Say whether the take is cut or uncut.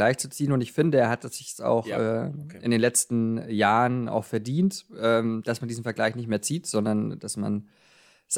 uncut